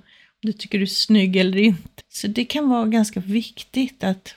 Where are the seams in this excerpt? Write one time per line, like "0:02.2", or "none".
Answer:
0:02.0